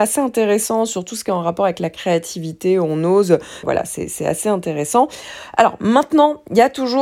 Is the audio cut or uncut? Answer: cut